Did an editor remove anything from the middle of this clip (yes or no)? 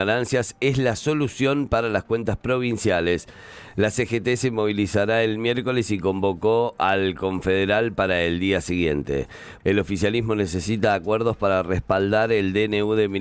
yes